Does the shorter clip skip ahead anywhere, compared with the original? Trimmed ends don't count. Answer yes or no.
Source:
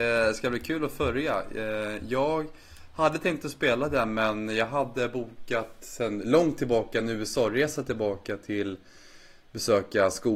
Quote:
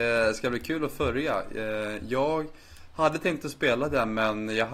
no